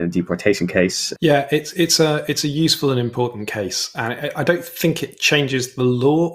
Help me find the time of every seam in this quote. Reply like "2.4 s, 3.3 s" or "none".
1.2 s

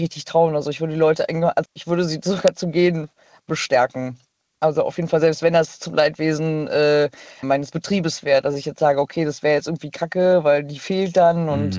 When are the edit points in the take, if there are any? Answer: 1.6 s, 4.5 s, 7.4 s

